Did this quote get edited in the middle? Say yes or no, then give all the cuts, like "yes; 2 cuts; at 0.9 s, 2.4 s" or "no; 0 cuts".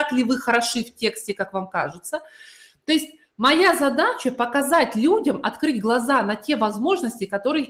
no; 0 cuts